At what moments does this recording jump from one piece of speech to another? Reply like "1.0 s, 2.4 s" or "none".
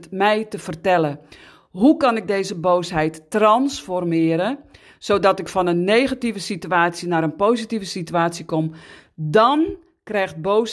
none